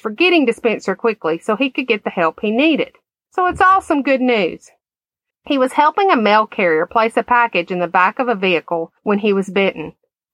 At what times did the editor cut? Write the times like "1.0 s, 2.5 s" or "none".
3.3 s, 5.3 s, 9.0 s